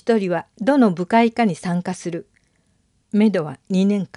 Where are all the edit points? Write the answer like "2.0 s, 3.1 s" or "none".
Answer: 3.0 s